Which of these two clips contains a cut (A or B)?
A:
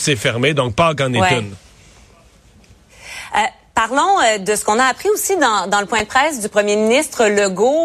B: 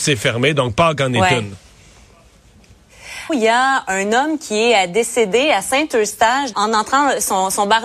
B